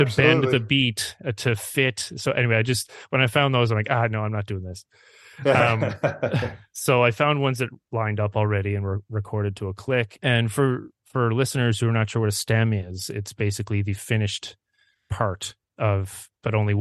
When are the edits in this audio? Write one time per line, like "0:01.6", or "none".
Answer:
0:10.2